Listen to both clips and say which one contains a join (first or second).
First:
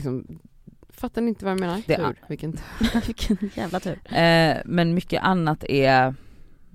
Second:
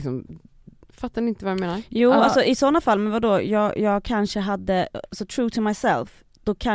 first